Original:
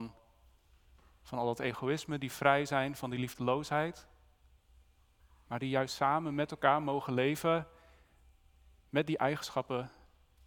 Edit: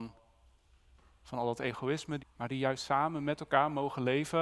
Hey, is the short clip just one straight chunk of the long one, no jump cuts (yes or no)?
no